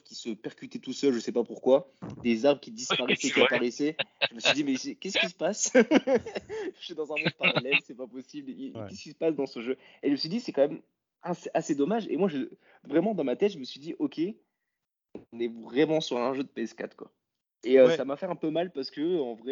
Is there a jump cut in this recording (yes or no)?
no